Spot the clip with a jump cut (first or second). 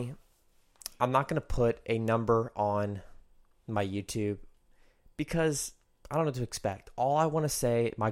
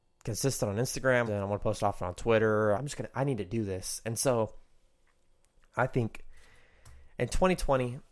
second